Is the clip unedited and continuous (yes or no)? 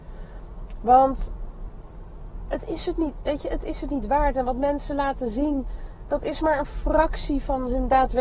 yes